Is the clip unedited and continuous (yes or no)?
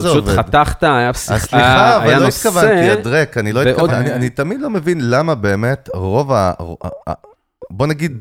no